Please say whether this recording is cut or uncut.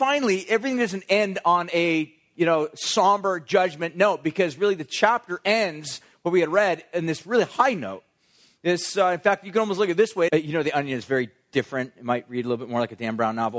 cut